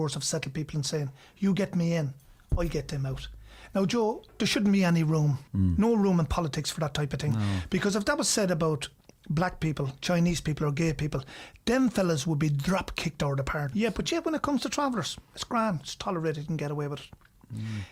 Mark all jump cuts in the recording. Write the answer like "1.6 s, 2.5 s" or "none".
5.5 s, 13.7 s